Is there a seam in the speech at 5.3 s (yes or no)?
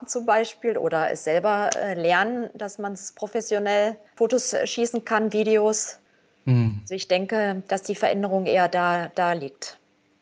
yes